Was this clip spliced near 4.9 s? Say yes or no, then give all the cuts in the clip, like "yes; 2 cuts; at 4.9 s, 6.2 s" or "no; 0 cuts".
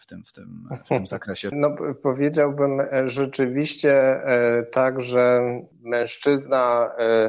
no; 1 cut; at 1.5 s